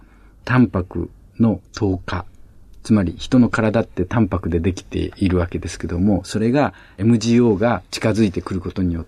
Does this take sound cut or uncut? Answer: cut